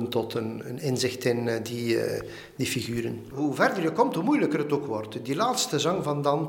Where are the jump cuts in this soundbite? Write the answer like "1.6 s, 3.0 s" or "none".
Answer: none